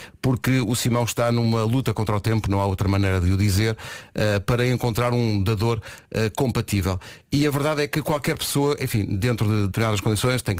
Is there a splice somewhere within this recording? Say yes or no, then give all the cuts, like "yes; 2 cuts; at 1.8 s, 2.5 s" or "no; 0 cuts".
no; 0 cuts